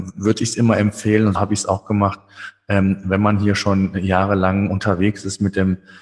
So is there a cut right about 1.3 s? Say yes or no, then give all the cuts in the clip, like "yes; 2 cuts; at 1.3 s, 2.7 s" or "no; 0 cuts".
yes; 1 cut; at 1.3 s